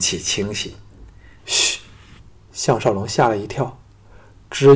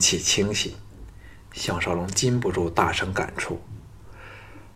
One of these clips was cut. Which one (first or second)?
first